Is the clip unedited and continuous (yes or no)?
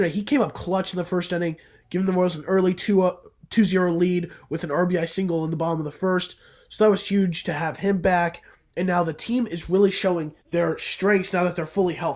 no